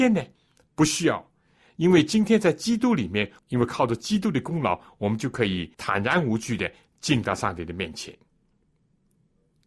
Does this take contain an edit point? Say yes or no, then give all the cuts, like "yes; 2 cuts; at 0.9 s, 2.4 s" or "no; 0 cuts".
yes; 2 cuts; at 3.4 s, 5.7 s